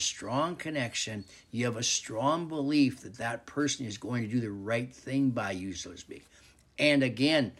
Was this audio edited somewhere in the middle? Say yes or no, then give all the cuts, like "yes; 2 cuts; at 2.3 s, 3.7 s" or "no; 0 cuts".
no; 0 cuts